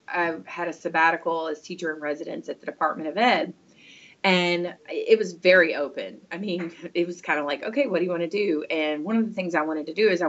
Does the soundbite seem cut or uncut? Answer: uncut